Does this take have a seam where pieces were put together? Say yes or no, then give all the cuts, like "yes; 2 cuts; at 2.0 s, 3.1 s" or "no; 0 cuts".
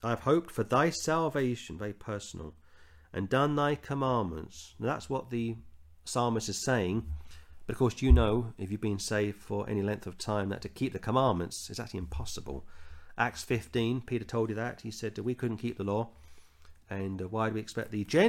no; 0 cuts